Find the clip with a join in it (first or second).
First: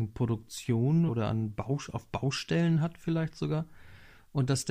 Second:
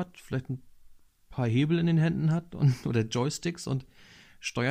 first